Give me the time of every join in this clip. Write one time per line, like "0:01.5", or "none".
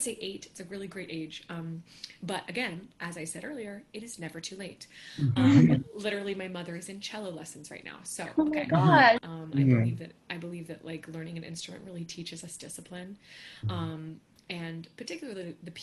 0:09.2